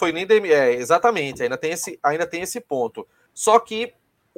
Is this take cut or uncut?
cut